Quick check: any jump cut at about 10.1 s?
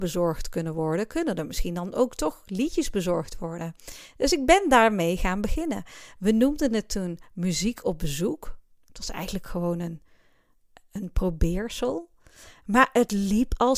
no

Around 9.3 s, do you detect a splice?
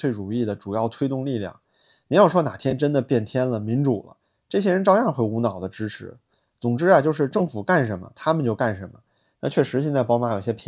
yes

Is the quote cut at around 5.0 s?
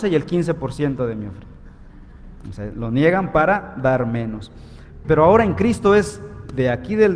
yes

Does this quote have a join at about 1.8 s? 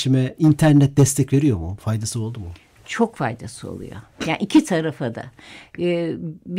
yes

